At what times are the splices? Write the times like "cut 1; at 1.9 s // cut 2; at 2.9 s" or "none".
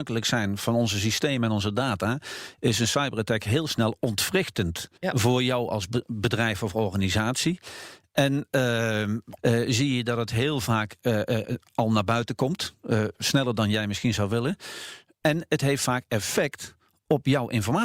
cut 1; at 5.0 s // cut 2; at 9.4 s